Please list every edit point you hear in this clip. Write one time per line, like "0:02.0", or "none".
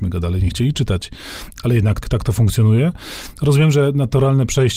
0:02.0